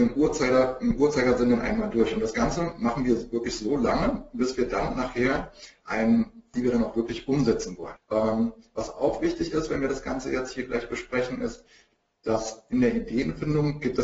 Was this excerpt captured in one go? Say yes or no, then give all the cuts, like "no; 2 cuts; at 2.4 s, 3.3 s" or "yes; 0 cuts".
no; 2 cuts; at 6.5 s, 8.0 s